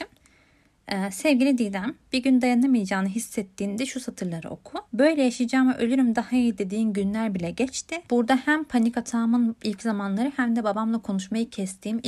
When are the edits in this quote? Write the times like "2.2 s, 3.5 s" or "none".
4.8 s, 8.1 s

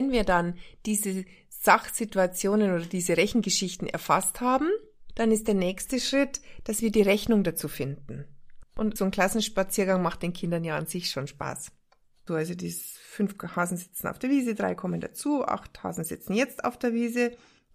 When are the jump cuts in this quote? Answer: 8.6 s, 12.3 s

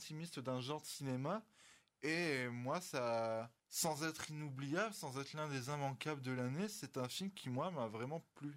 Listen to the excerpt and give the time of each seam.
3.6 s

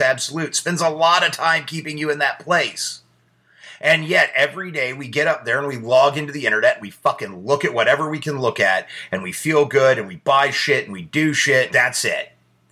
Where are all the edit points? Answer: 11.7 s

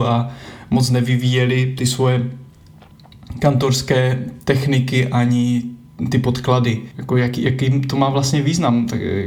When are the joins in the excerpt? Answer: 6.9 s

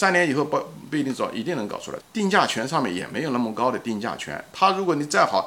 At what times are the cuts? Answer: 2.0 s

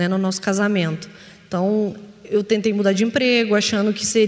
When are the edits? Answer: none

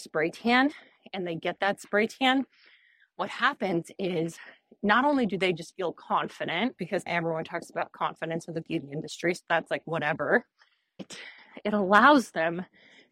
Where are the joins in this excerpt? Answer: none

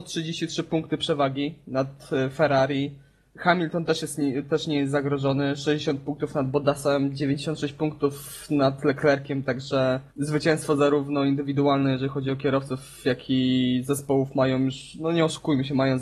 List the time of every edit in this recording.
10.1 s

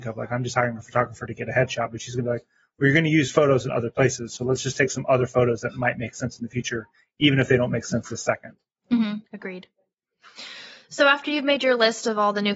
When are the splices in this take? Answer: 9.3 s

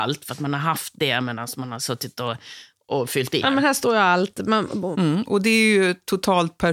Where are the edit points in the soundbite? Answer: 3.4 s, 4.9 s

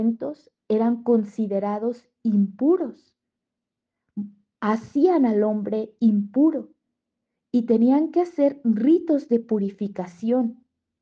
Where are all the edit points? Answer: none

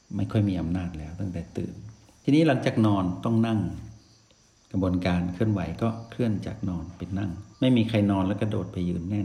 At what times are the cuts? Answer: 7.5 s

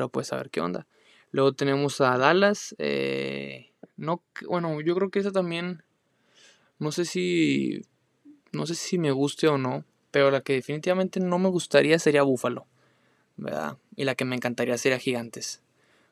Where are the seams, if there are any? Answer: none

